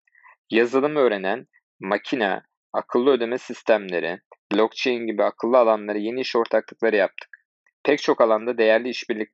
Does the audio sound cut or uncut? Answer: cut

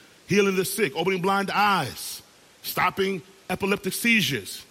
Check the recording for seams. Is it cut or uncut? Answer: cut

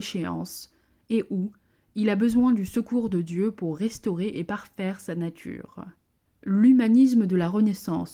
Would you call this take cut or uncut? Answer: cut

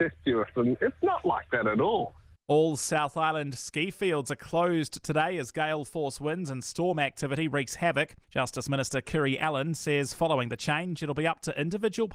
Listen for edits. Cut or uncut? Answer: cut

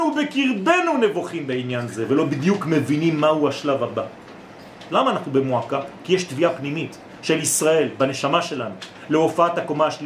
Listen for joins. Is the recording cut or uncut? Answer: cut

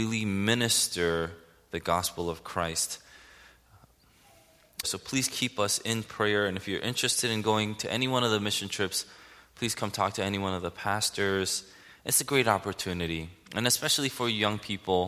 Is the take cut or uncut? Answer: cut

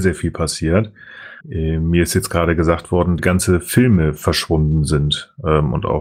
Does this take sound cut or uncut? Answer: cut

